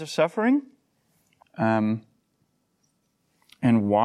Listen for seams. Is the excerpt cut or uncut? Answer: cut